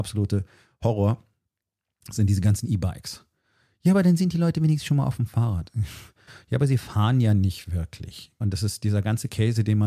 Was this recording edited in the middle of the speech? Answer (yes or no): yes